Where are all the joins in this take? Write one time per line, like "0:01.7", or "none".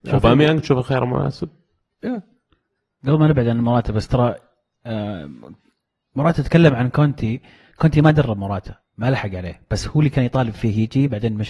none